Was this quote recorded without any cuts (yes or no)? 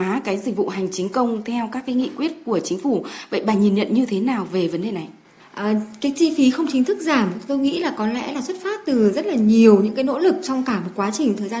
yes